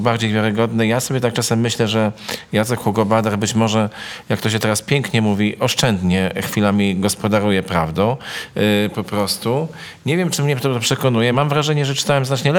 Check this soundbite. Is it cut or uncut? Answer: uncut